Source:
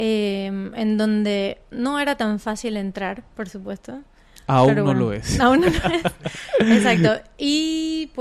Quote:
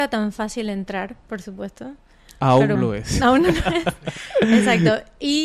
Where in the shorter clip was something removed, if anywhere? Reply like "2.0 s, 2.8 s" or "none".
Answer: 2.8 s